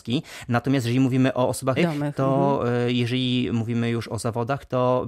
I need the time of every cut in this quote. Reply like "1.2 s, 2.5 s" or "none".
1.8 s